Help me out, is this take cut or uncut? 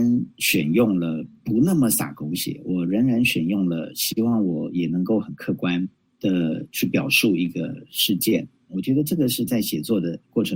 cut